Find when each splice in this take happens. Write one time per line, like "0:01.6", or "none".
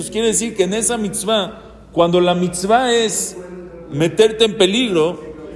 none